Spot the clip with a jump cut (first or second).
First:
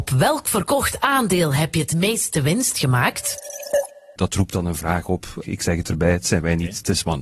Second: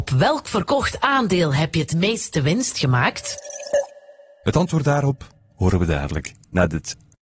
first